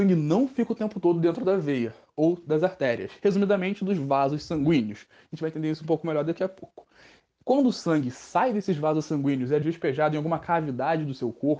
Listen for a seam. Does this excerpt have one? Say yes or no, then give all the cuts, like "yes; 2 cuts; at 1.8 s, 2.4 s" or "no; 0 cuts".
yes; 1 cut; at 9.6 s